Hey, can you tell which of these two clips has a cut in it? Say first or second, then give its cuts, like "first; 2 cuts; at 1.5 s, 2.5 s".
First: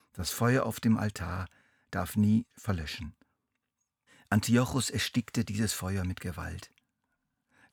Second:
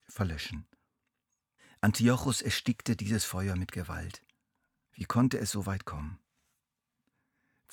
second; 1 cut; at 4.9 s